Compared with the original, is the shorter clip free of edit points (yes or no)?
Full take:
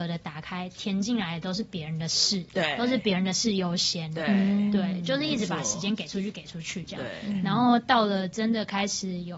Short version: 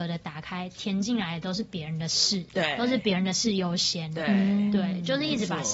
yes